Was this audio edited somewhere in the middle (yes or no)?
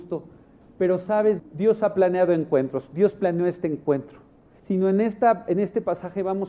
yes